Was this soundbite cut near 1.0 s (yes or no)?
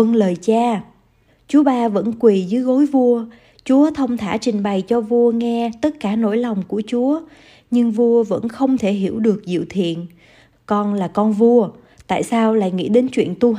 no